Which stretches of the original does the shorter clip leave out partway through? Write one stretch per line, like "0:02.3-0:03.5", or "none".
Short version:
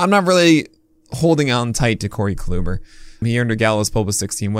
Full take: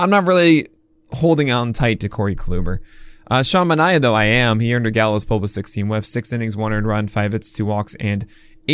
0:03.2-0:04.6